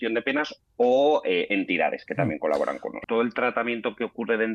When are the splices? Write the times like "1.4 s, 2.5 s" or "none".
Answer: 3.0 s